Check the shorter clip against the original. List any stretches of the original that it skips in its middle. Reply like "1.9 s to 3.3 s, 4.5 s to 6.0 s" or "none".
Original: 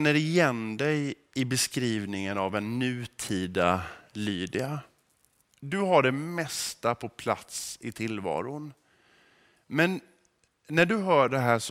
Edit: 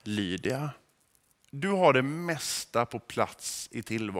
none